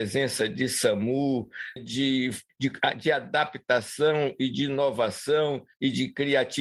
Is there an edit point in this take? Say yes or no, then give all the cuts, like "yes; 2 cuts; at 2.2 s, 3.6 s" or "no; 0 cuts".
yes; 1 cut; at 1.8 s